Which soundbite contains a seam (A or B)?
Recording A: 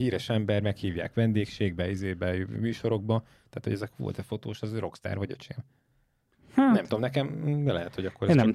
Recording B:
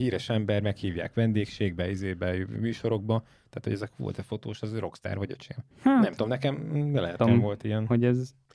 B